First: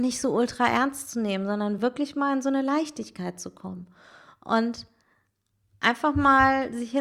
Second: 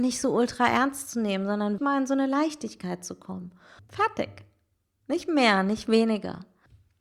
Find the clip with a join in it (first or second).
second